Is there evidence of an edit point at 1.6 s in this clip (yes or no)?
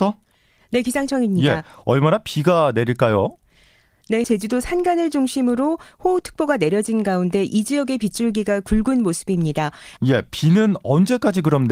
no